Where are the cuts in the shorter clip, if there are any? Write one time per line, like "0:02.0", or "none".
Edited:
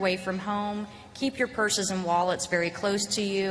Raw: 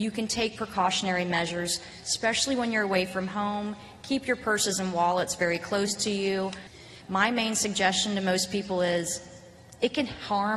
none

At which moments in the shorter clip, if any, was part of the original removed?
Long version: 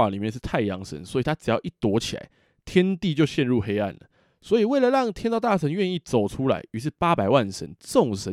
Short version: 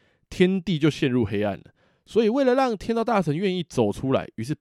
none

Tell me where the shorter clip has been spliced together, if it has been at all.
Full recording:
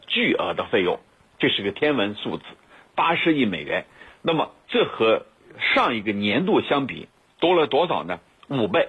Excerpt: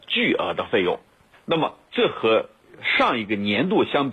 0:01.3

